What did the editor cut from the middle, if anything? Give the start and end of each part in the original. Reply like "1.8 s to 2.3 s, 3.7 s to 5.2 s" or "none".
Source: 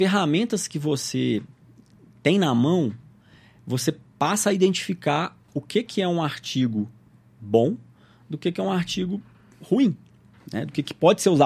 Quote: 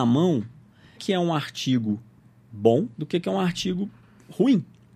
3.4 s to 5.8 s, 7.8 s to 8.2 s